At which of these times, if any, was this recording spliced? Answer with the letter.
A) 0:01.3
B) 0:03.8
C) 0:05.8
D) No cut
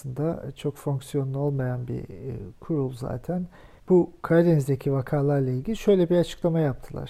B